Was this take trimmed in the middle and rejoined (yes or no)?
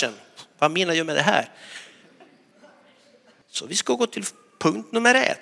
yes